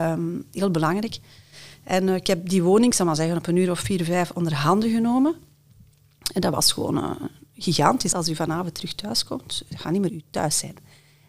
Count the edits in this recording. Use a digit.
2